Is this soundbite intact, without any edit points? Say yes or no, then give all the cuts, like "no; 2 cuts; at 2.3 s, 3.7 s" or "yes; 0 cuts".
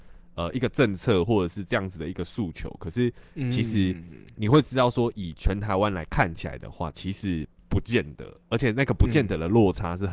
yes; 0 cuts